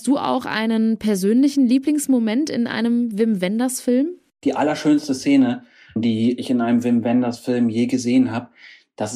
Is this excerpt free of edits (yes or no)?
yes